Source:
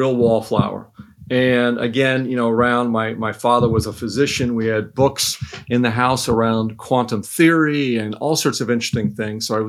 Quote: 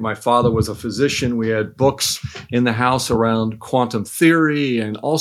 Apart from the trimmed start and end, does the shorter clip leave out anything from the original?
no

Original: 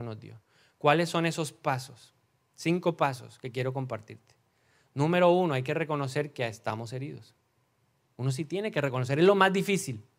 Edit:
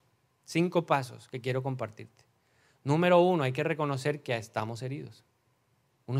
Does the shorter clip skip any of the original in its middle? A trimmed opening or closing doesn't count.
no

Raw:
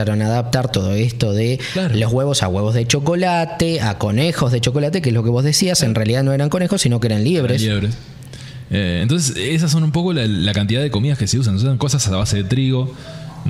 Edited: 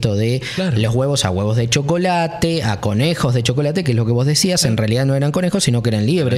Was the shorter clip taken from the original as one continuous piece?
yes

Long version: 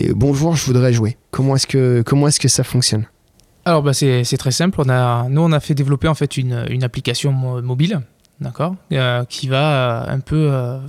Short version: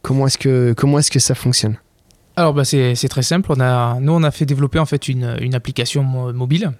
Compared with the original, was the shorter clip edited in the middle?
no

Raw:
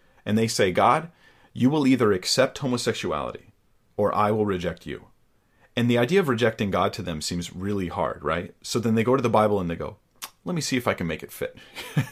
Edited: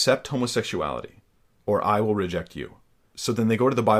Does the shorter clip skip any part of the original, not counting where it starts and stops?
yes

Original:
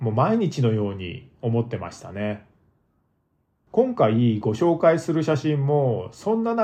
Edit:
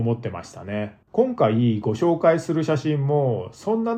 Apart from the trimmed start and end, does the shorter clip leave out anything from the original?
yes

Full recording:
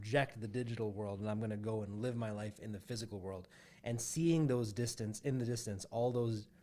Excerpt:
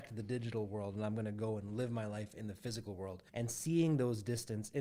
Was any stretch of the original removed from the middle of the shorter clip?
yes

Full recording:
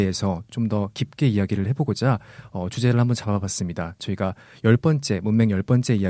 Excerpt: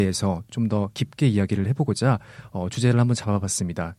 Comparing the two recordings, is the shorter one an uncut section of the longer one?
yes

